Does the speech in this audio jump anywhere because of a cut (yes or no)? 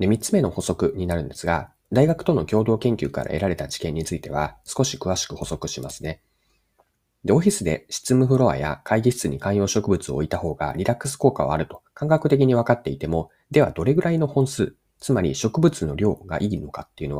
no